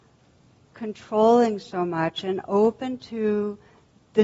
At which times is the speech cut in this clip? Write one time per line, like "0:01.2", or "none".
none